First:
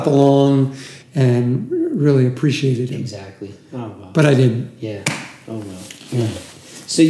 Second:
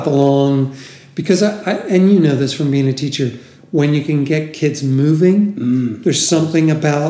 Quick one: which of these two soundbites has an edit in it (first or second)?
first